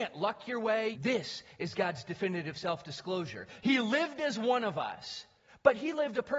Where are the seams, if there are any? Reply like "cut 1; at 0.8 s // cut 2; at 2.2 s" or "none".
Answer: cut 1; at 0.9 s // cut 2; at 3.6 s